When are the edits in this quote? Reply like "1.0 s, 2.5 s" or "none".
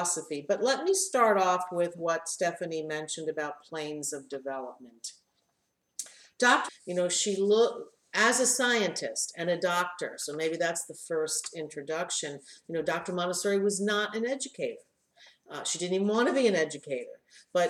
6.7 s